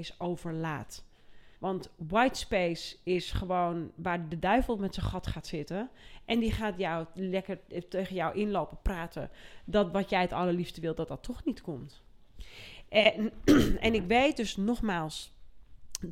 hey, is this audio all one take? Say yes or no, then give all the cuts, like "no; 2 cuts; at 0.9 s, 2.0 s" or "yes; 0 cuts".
no; 1 cut; at 1.6 s